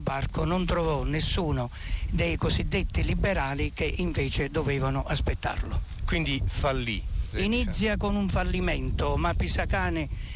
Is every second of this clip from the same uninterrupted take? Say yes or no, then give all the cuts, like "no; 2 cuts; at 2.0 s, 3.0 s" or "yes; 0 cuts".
no; 1 cut; at 7.3 s